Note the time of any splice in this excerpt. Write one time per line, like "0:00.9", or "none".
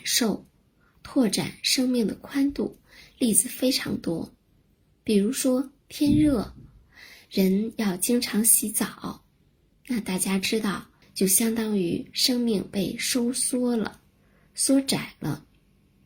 0:11.0

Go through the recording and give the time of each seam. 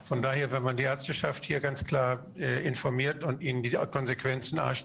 none

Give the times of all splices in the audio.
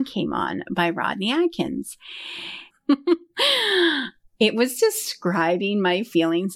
0:02.7

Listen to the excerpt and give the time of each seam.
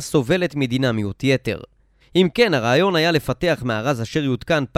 0:02.0

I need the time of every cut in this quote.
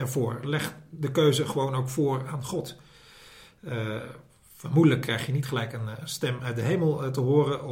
none

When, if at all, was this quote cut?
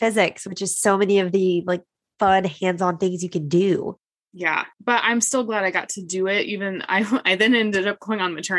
0:04.7

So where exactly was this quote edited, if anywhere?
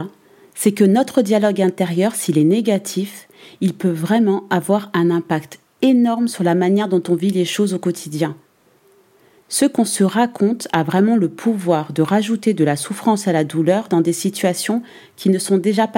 none

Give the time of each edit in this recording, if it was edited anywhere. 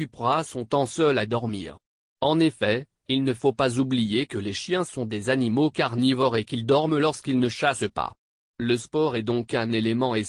none

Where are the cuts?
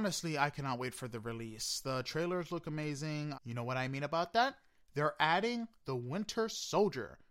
0:03.3

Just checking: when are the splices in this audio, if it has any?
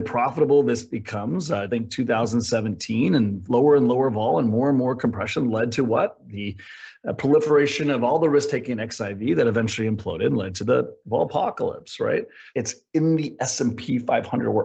0:01.7
0:12.5

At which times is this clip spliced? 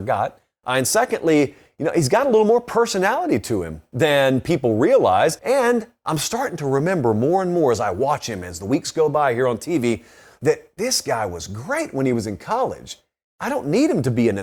0:05.4

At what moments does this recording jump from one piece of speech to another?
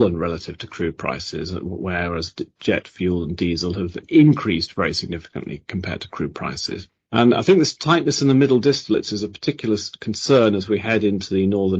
none

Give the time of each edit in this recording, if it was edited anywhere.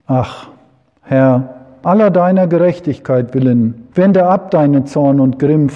0:01.8
0:03.9

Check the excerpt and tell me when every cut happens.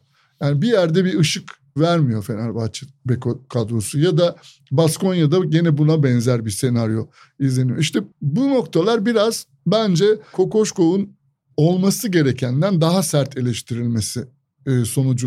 0:08.1

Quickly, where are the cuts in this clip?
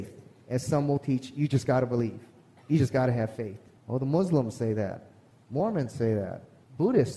none

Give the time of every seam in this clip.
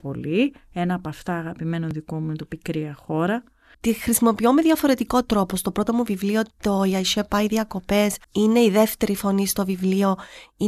0:03.7
0:08.2

